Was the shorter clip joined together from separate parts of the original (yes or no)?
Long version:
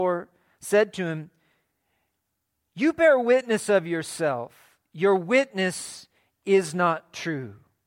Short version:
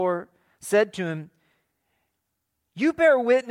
no